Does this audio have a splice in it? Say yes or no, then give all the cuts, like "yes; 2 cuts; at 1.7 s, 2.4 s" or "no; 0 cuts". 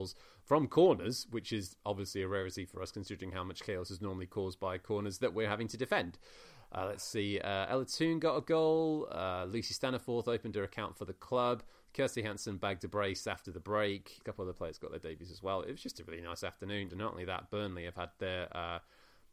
yes; 2 cuts; at 14.2 s, 16.9 s